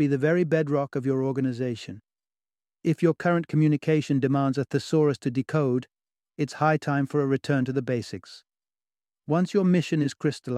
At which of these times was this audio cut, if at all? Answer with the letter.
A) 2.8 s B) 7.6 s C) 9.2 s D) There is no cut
A